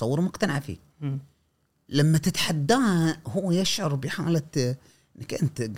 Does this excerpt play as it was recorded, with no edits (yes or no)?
yes